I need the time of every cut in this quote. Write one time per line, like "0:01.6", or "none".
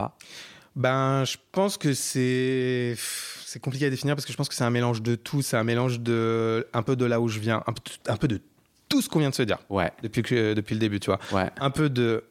none